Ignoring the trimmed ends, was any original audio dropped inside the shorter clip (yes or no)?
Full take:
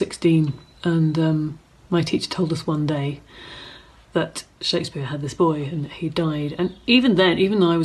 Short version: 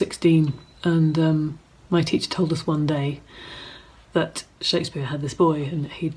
no